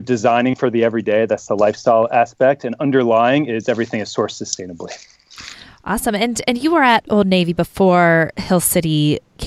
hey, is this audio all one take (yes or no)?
yes